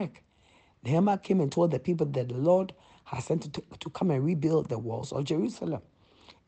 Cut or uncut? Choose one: uncut